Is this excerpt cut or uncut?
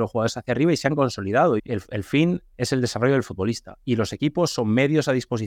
cut